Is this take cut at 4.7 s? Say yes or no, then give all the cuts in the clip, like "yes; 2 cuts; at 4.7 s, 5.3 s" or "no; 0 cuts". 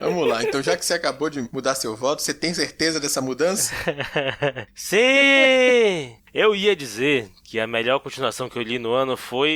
no; 1 cut; at 6.2 s